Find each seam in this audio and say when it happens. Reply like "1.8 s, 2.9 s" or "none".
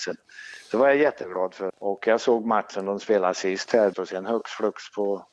1.7 s, 3.9 s